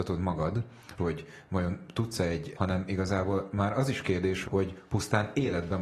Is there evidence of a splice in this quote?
yes; 3 cuts; at 1.0 s, 2.5 s, 4.4 s

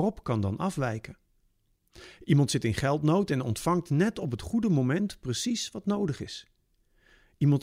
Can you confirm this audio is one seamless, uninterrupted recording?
yes; 0 cuts

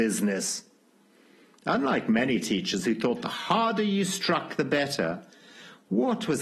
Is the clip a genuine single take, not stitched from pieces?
yes; 0 cuts

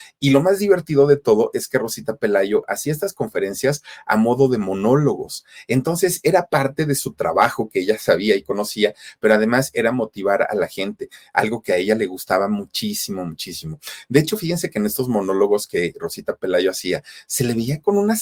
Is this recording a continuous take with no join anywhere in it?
yes; 0 cuts

